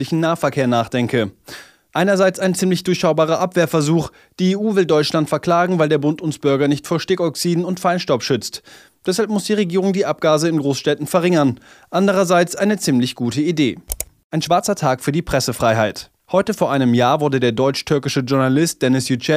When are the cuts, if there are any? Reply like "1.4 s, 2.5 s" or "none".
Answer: 16.2 s